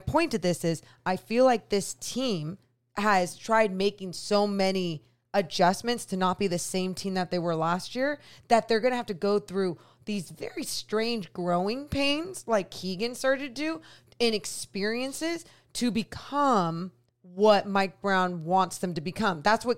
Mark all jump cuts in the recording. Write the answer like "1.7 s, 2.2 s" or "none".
none